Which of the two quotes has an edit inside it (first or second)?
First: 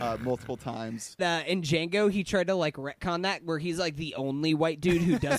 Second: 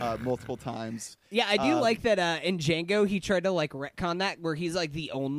first